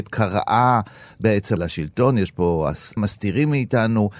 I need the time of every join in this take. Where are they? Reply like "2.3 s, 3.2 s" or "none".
1.6 s, 3.0 s